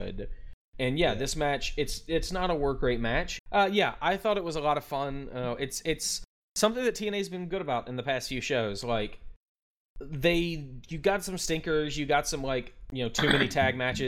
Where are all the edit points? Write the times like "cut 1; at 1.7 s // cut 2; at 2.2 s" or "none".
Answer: cut 1; at 3.4 s